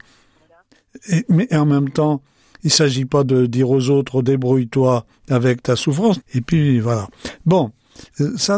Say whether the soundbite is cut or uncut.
cut